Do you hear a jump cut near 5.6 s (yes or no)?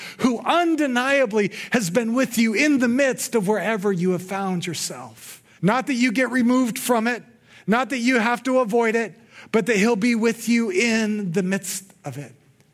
yes